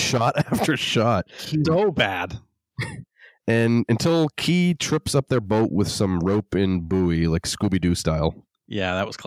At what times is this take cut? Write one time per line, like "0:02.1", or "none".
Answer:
0:01.6